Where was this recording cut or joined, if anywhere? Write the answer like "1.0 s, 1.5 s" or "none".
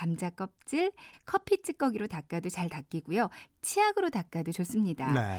1.1 s

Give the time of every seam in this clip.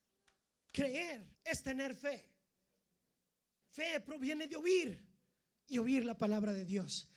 1.3 s

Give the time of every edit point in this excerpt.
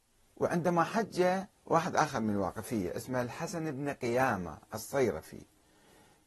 1.6 s

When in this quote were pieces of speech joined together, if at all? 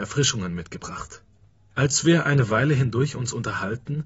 1.7 s

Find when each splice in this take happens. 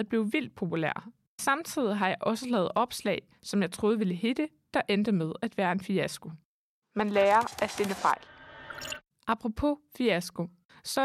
none

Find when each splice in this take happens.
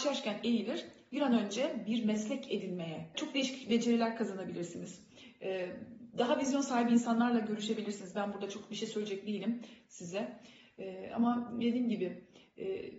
3.1 s

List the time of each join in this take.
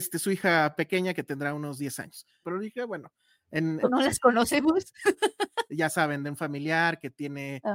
2.4 s, 3.8 s, 5.7 s

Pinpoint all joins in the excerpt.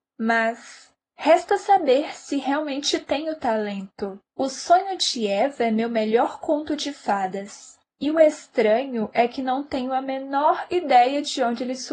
4.3 s

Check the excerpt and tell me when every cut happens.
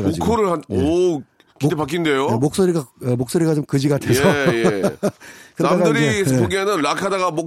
none

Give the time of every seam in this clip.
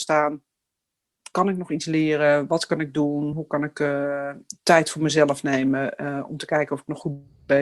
none

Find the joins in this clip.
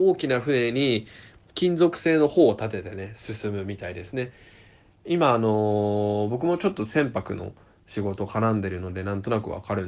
4.9 s

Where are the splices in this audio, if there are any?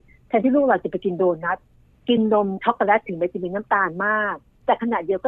none

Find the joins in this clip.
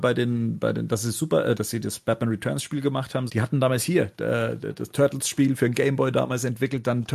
1.6 s, 3.3 s

